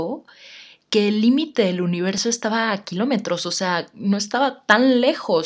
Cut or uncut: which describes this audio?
uncut